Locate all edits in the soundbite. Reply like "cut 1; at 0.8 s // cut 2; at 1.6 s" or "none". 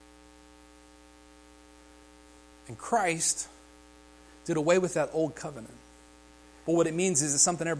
cut 1; at 6.6 s

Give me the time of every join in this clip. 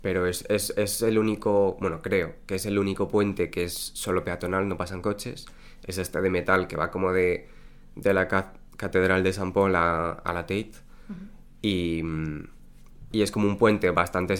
none

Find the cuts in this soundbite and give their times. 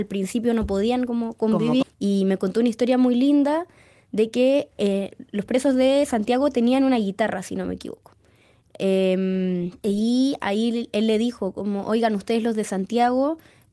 cut 1; at 1.8 s // cut 2; at 9.8 s

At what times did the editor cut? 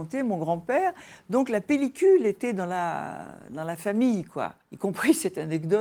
cut 1; at 4.6 s

